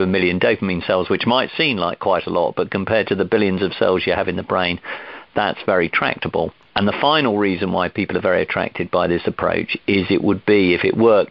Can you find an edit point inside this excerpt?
no; 0 cuts

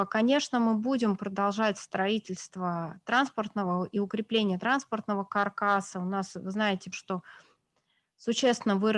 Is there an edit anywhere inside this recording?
yes; 1 cut; at 6.9 s

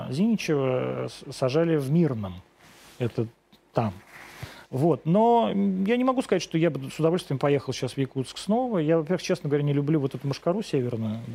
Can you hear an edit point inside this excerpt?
yes; 1 cut; at 4.7 s

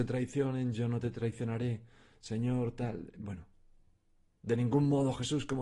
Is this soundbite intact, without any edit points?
yes; 0 cuts

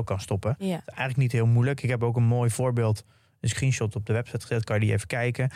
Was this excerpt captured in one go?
yes; 0 cuts

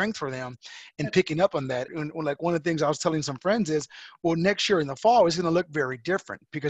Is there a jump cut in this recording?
yes; 1 cut; at 1.9 s

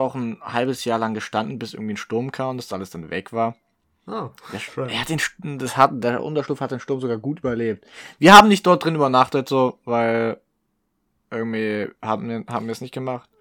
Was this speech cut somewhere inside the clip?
no; 0 cuts

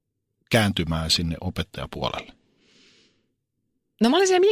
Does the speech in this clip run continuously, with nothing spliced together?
yes; 0 cuts

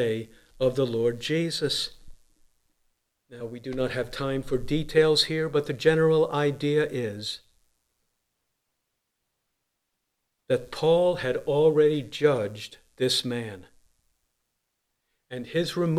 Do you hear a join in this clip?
no; 0 cuts

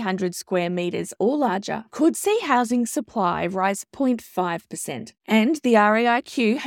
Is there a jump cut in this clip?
no; 0 cuts

